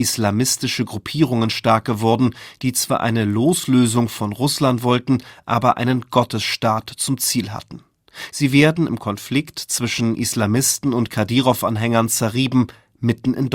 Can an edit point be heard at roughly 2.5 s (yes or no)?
no